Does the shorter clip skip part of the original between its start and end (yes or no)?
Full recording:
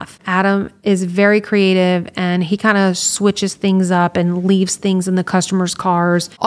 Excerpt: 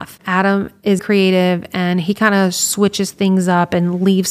yes